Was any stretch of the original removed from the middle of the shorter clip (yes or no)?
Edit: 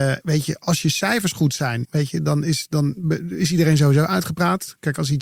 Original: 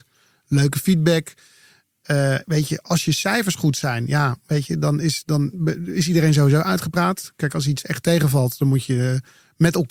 yes